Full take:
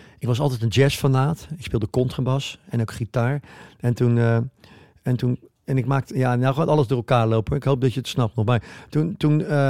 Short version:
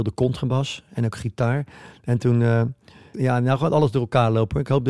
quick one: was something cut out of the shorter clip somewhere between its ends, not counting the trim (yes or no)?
yes